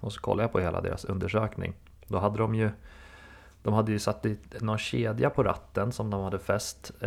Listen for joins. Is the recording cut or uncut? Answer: uncut